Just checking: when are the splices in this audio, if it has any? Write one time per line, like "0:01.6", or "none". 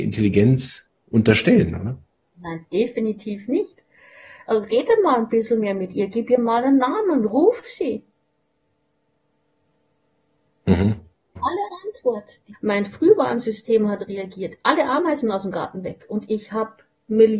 0:11.4
0:12.5

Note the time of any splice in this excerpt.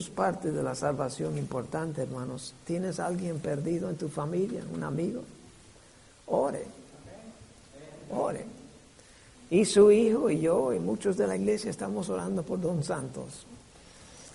none

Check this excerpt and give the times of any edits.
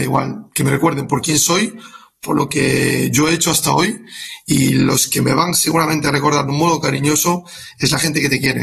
none

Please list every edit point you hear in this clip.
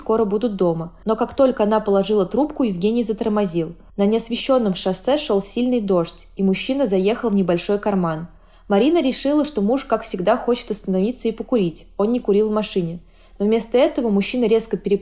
none

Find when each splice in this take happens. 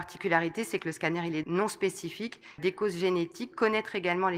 0:01.4
0:02.6

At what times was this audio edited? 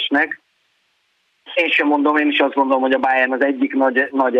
0:01.5

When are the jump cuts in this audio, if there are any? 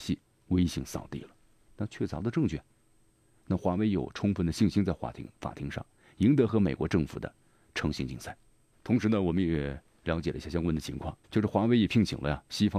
0:01.7
0:08.7
0:11.2

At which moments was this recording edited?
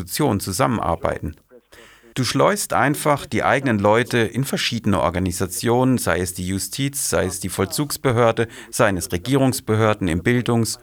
0:02.1

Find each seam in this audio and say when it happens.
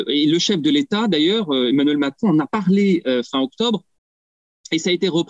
none

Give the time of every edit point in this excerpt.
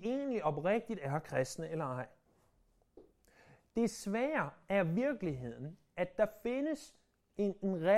none

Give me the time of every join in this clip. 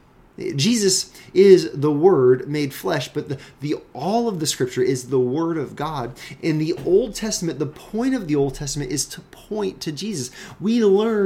none

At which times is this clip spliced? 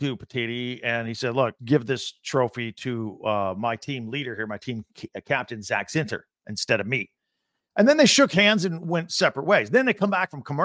0:01.6

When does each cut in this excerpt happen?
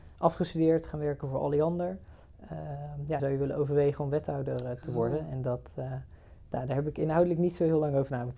0:03.2

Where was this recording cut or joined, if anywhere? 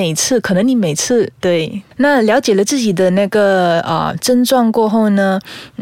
0:01.4

